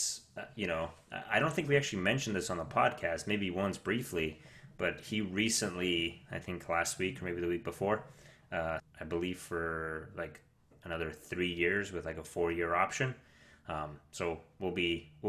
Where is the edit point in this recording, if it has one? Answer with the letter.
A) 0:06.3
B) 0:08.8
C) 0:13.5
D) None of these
B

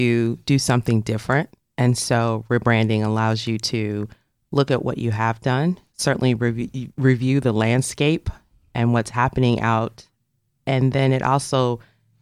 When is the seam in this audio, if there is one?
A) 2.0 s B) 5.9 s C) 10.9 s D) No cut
D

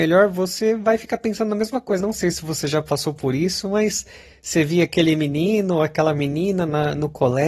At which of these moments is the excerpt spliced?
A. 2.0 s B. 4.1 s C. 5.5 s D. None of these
A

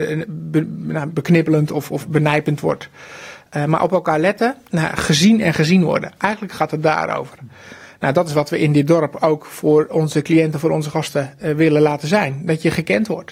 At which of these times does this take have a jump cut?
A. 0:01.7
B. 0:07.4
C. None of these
B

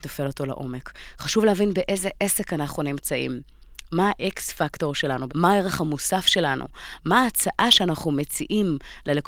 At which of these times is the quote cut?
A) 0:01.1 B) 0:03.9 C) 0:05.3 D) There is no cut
C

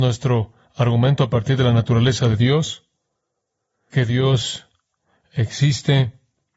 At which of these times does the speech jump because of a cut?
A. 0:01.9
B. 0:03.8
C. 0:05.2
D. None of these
D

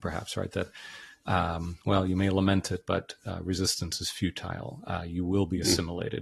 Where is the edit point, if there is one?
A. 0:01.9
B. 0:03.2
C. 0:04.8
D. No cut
D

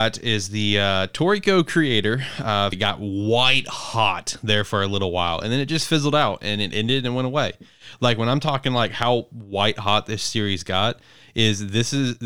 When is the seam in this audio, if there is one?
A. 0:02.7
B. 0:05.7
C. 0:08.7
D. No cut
A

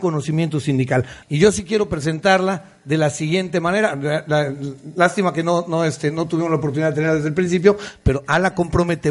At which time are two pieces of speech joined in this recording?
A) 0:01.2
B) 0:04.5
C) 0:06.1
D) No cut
A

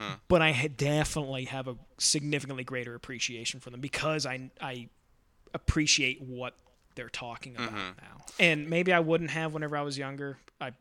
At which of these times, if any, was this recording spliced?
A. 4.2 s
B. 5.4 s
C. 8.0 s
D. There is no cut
D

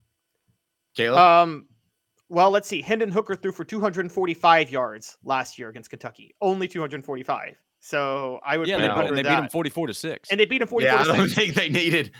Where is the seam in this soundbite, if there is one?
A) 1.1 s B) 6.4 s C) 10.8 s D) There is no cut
D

